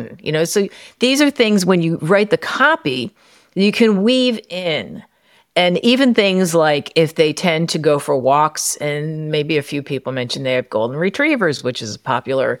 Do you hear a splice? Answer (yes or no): no